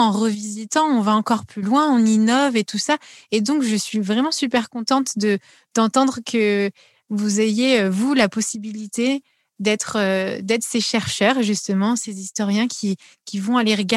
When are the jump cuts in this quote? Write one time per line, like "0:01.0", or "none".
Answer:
none